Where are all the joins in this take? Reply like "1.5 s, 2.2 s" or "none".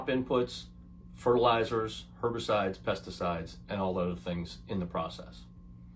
none

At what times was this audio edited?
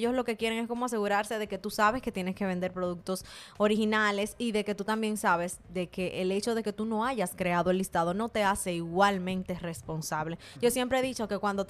none

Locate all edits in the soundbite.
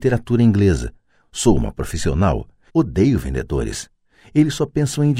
1.2 s, 2.7 s

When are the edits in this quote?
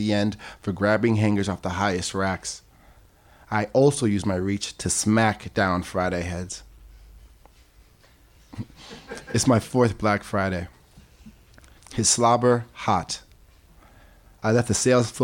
11.8 s

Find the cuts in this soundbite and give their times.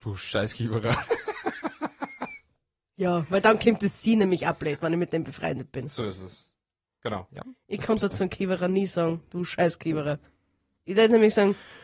7.3 s

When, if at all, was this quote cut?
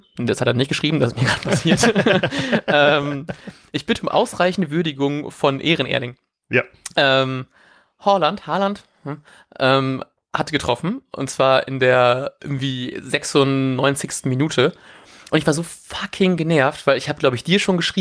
none

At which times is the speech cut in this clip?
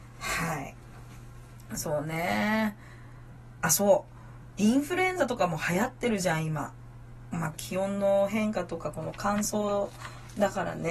7.5 s

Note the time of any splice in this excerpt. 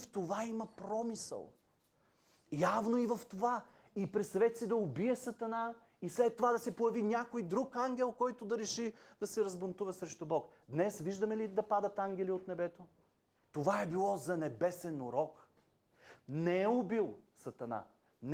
13.4 s

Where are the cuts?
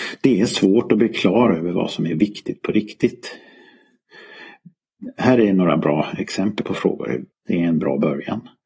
7.3 s

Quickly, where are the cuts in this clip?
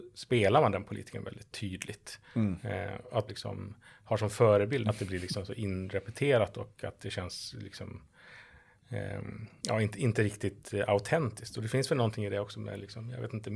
3.3 s, 4.8 s

